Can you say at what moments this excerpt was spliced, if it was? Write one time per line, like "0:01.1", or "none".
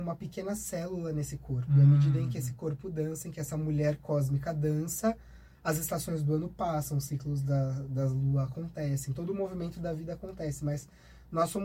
none